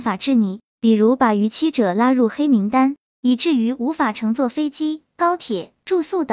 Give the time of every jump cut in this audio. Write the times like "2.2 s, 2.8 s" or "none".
none